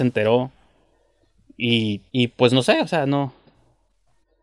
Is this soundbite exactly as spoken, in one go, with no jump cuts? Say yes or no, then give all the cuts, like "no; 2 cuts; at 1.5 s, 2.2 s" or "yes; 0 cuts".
no; 1 cut; at 2.1 s